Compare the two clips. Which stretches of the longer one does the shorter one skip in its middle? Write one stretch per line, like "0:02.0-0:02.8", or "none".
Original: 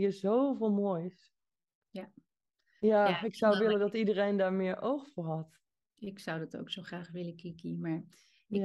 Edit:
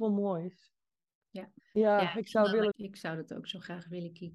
0:02.2-0:02.7
0:03.8-0:05.9